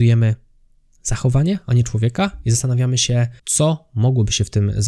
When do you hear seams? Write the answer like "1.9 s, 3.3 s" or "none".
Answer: 3.4 s

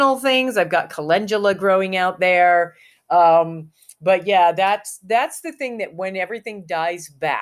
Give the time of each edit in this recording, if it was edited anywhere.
none

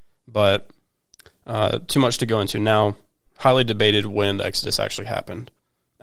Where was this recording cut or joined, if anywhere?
none

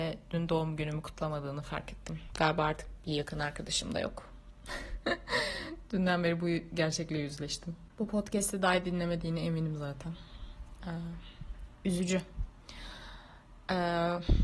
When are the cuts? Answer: none

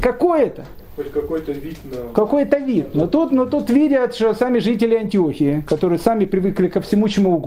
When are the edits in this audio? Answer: none

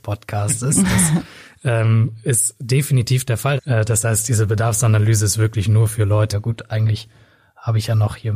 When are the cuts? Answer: 3.6 s, 6.3 s

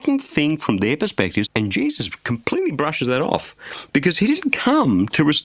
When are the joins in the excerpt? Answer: 1.5 s

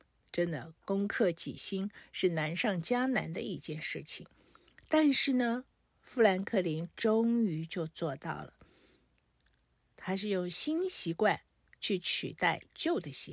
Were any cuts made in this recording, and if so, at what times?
none

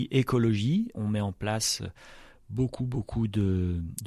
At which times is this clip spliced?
0.9 s

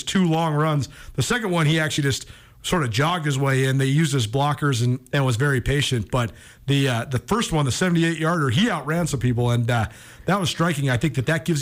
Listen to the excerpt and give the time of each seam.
none

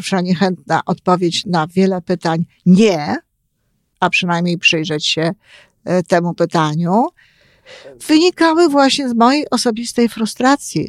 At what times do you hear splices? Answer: 1.4 s, 3.9 s

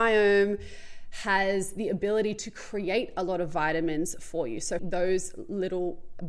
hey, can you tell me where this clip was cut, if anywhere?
4.8 s

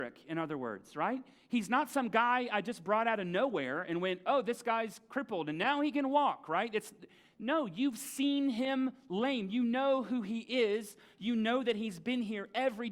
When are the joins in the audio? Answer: none

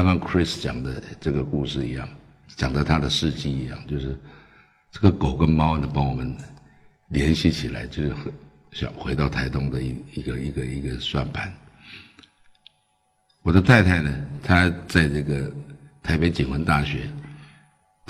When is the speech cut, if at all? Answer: none

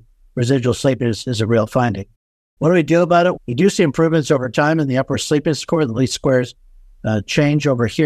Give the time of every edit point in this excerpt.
3.4 s

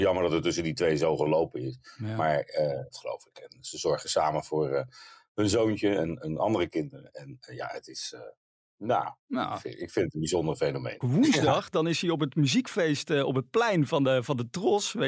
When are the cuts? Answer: 2.9 s, 11.0 s

